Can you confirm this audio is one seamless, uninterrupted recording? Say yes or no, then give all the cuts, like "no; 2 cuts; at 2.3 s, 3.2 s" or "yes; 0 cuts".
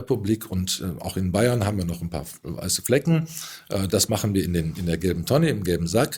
no; 1 cut; at 3.9 s